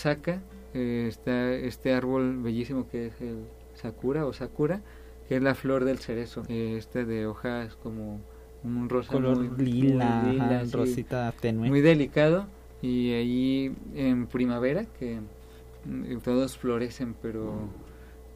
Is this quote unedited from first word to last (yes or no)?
no